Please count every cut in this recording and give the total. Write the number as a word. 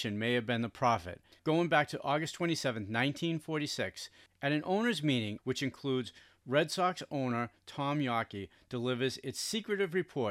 two